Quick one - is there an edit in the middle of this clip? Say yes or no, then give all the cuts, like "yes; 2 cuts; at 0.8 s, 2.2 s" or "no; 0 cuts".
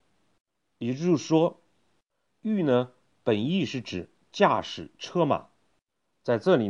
yes; 1 cut; at 2.3 s